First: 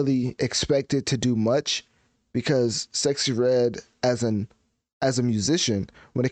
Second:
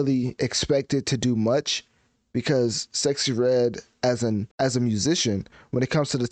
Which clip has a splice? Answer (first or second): second